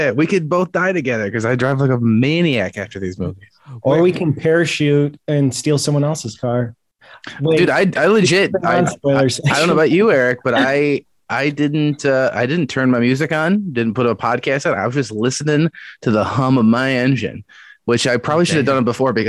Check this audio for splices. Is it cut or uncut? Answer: uncut